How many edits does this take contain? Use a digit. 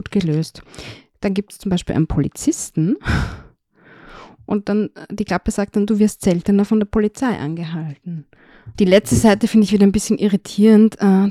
1